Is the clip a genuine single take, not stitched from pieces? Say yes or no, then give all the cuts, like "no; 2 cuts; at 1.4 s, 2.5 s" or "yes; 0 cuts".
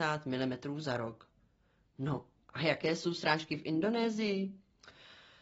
yes; 0 cuts